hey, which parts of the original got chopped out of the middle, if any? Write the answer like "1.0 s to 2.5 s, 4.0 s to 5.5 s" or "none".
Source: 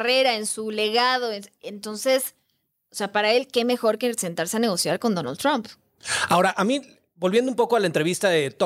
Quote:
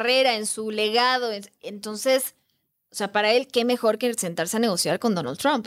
none